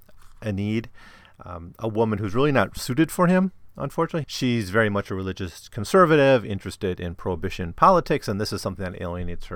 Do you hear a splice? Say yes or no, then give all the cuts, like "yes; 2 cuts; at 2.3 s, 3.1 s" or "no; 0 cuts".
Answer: yes; 1 cut; at 4.2 s